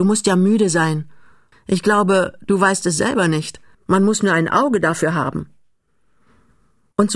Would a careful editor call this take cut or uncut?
cut